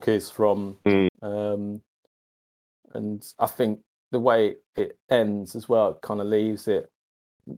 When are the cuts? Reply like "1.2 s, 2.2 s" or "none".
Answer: 1.1 s, 6.0 s